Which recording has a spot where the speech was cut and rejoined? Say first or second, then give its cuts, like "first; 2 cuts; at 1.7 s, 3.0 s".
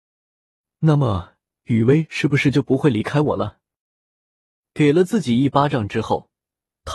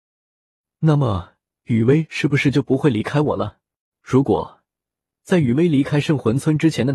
second; 1 cut; at 3.9 s